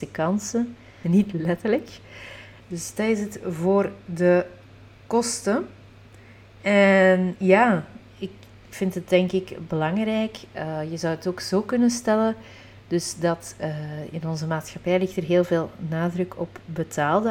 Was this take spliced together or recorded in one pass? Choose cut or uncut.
cut